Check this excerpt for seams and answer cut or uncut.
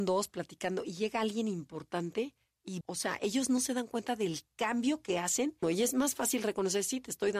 cut